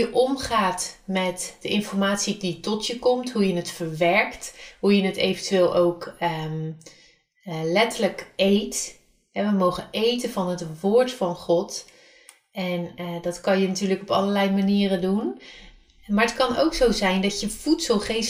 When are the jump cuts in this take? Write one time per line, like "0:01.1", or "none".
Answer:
none